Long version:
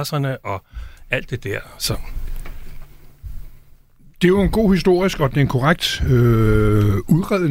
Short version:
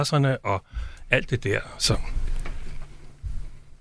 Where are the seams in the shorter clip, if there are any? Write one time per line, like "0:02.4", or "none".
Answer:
none